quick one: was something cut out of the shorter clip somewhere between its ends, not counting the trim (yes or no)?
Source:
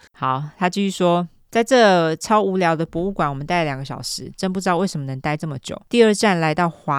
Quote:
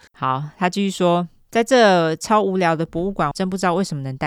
yes